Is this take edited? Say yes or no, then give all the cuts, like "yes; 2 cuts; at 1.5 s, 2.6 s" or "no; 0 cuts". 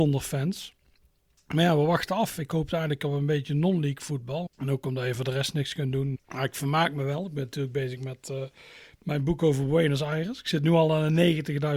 yes; 2 cuts; at 4.5 s, 6.2 s